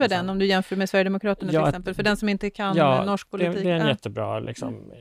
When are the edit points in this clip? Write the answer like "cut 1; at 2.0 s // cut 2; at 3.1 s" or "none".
none